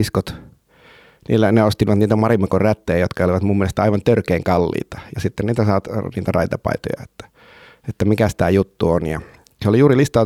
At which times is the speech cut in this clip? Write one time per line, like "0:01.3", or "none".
none